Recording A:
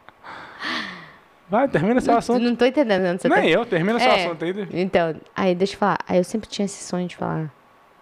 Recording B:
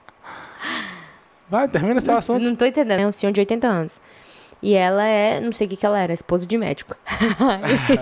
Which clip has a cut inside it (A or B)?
B